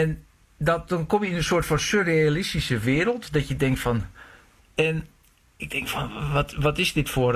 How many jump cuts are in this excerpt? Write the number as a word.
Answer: one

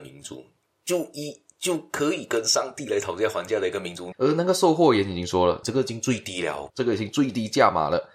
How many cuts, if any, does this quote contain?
three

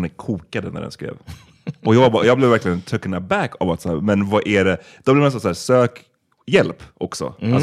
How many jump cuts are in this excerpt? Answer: zero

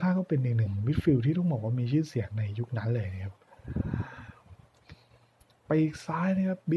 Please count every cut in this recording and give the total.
zero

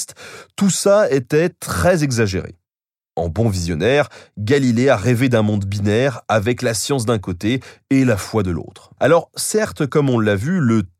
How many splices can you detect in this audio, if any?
one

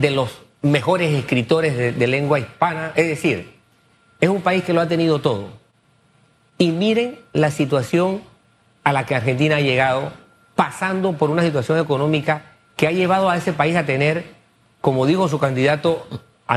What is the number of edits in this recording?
zero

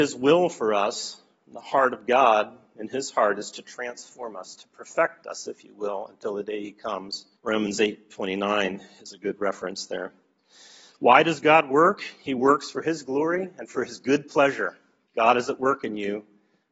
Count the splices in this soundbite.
one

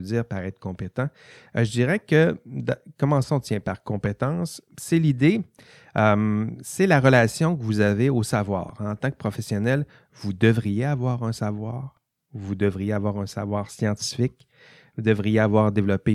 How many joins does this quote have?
zero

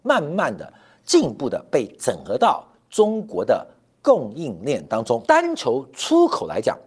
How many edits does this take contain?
one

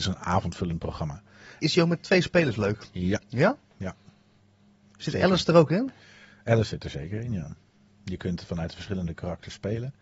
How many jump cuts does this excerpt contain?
one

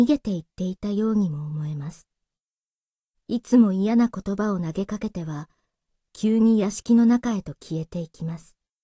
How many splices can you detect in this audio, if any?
one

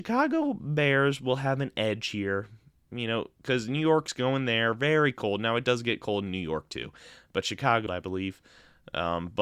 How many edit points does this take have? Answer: one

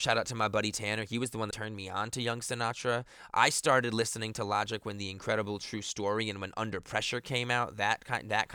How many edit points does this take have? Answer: one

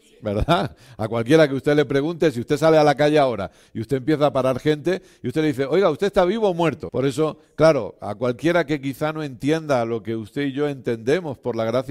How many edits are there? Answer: one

